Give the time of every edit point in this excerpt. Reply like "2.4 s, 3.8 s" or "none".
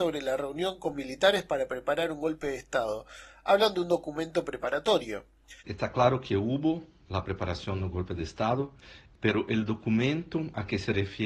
5.6 s